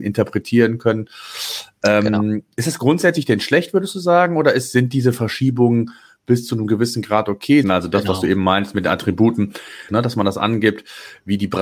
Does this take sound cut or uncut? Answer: cut